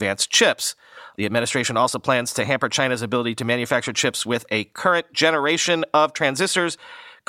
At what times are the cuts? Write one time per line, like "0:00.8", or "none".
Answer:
0:01.1

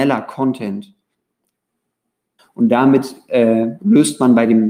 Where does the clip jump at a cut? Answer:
0:02.4
0:03.8

